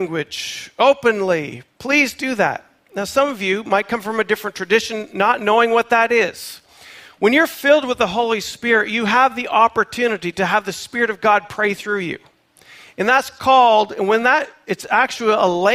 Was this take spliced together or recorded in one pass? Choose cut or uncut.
uncut